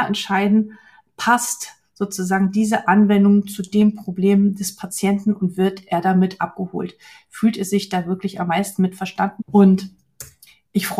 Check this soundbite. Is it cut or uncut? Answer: cut